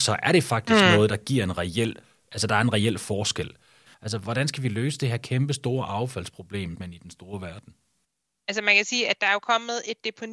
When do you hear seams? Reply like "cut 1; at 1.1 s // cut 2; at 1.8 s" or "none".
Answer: cut 1; at 3.9 s // cut 2; at 6.8 s